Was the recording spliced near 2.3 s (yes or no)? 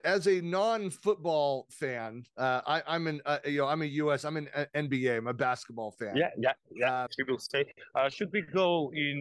no